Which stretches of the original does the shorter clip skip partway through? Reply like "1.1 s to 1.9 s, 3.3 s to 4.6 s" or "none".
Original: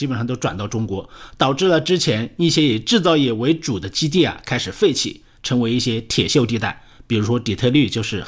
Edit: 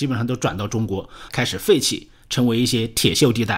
1.3 s to 4.4 s